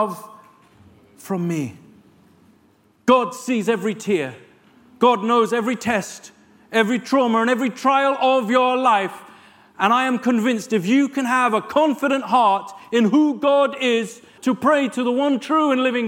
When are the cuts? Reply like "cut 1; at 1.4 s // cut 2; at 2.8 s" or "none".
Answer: cut 1; at 14.4 s